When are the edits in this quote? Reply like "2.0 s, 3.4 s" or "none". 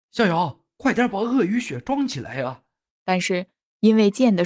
2.9 s